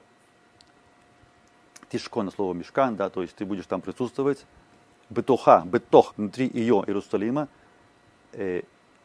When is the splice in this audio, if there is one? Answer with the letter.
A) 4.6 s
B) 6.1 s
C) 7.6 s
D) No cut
B